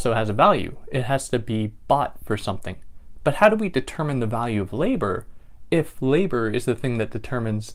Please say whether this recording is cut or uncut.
uncut